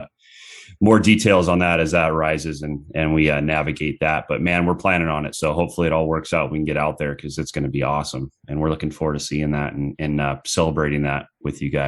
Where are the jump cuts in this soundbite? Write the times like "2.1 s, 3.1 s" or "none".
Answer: none